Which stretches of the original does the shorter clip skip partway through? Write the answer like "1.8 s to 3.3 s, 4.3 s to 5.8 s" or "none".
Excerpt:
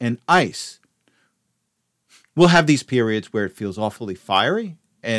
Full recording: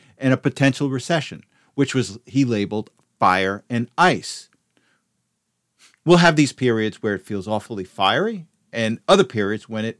none

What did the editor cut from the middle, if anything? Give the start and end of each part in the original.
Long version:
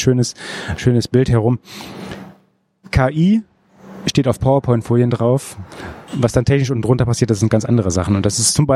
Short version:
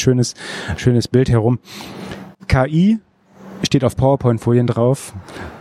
2.3 s to 2.8 s

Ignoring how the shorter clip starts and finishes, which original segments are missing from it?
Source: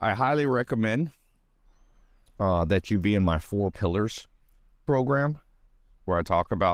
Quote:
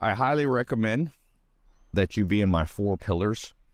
1.9 s to 2.7 s

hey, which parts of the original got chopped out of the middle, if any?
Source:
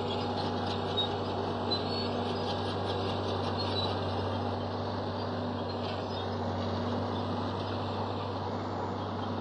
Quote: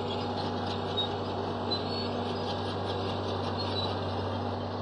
none

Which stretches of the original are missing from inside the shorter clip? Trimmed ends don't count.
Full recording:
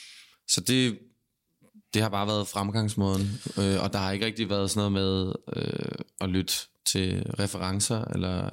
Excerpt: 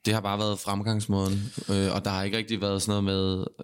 none

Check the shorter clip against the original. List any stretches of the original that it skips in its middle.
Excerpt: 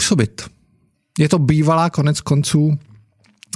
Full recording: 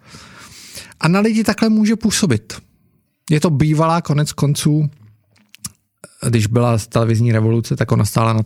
none

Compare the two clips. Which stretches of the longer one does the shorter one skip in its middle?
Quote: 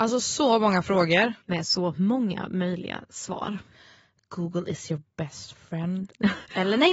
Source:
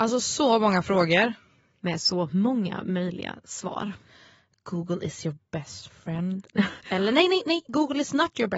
1.4 s to 1.8 s

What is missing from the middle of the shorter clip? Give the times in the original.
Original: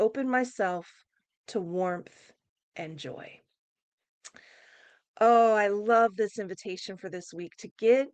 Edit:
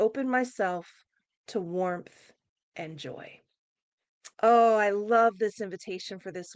4.3 s to 5.1 s

